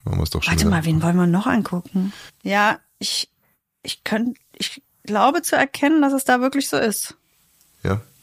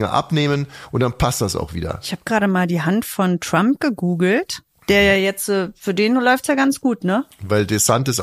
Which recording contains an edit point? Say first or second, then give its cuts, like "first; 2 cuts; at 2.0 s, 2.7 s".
first; 1 cut; at 2.3 s